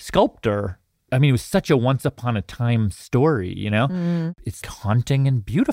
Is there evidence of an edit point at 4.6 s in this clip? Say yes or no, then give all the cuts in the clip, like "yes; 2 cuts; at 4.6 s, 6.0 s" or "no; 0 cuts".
yes; 1 cut; at 4.6 s